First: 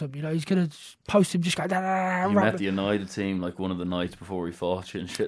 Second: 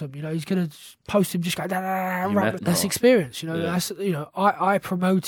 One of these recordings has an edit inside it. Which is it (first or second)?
second